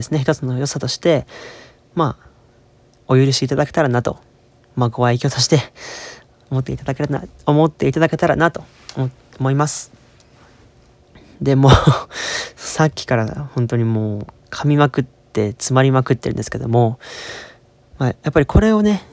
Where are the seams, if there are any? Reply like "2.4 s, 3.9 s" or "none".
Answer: none